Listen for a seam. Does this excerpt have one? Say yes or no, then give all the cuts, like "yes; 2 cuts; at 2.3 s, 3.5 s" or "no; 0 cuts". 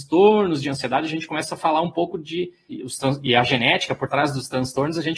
no; 0 cuts